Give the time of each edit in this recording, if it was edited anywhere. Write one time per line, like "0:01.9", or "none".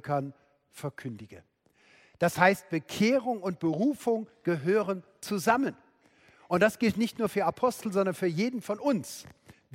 none